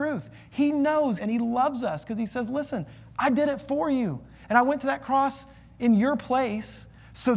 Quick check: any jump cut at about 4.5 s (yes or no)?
no